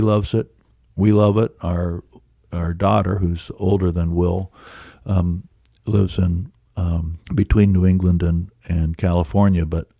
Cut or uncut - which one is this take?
cut